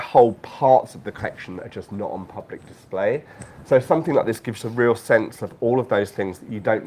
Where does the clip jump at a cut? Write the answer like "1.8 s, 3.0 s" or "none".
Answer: none